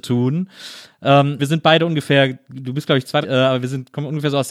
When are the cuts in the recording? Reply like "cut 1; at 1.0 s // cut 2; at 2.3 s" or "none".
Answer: cut 1; at 1.4 s // cut 2; at 3.2 s